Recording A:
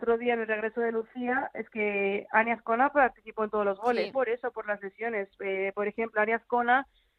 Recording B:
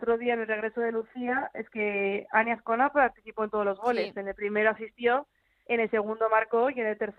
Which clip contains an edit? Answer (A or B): A